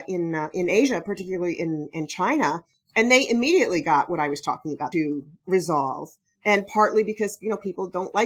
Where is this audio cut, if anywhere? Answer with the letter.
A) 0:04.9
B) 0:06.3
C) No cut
A